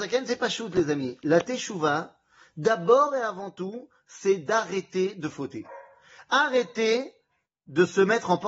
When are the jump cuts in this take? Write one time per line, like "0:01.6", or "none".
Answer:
none